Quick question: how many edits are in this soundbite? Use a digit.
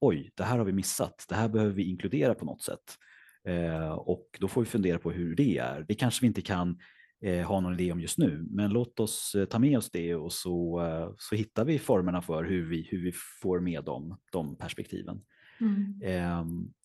0